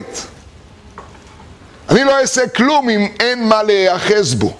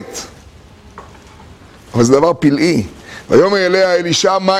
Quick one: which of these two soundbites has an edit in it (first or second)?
second